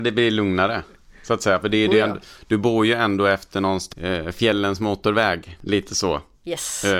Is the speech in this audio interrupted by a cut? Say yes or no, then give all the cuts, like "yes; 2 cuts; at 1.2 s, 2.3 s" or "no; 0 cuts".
no; 0 cuts